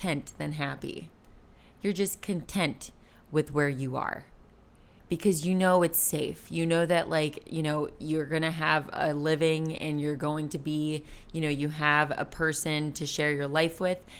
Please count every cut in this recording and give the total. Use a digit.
0